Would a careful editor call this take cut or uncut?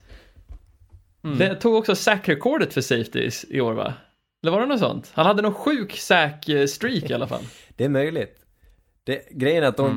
uncut